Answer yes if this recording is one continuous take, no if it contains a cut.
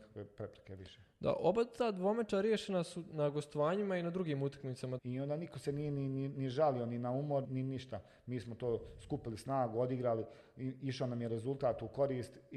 no